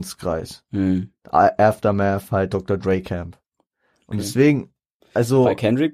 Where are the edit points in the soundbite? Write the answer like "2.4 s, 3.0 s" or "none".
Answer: none